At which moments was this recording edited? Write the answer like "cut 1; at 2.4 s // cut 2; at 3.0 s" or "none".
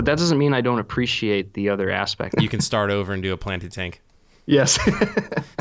cut 1; at 2.3 s